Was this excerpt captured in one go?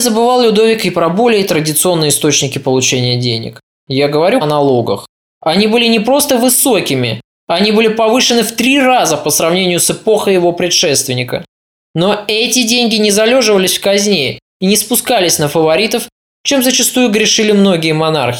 no; 1 cut; at 4.4 s

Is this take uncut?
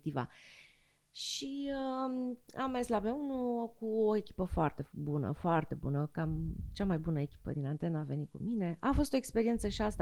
yes; 0 cuts

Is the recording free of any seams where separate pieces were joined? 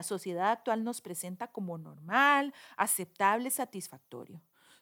yes; 0 cuts

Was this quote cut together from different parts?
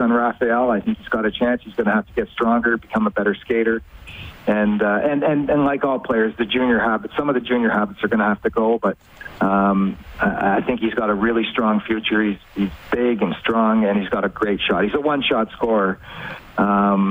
no; 0 cuts

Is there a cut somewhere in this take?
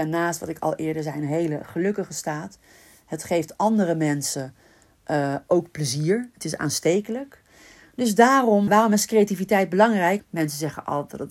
yes; 2 cuts; at 8.7 s, 10.2 s

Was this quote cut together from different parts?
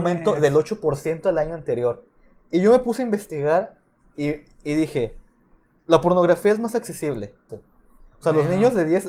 yes; 1 cut; at 7.5 s

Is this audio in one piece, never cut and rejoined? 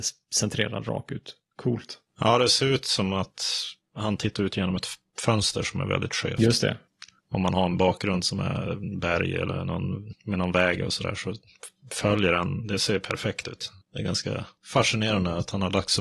yes; 0 cuts

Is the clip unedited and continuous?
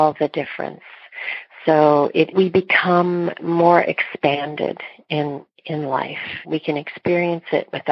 no; 2 cuts; at 2.3 s, 6.4 s

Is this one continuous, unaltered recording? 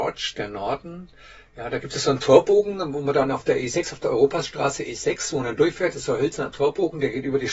yes; 0 cuts

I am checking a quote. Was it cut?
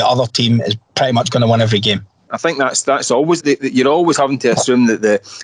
yes; 2 cuts; at 2.3 s, 3.4 s

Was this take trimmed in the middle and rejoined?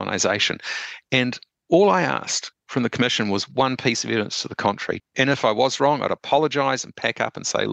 yes; 1 cut; at 5.0 s

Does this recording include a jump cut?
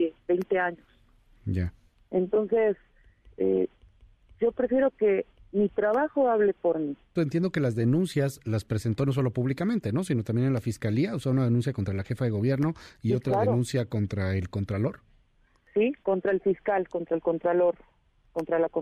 yes; 2 cuts; at 7.1 s, 16.0 s

